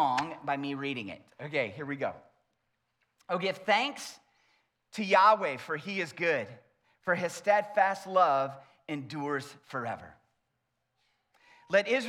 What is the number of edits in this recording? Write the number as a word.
zero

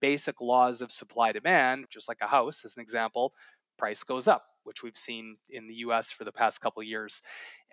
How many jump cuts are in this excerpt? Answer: one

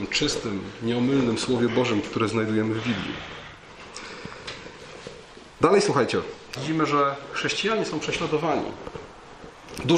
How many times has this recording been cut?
two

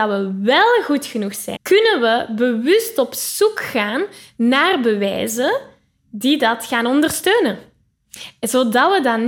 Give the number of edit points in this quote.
one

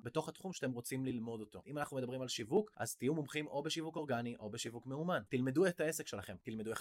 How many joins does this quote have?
two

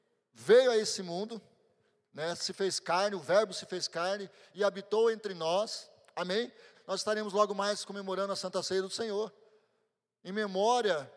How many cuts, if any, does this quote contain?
one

